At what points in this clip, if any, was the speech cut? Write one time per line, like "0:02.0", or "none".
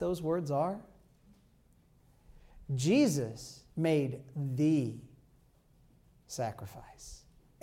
0:03.7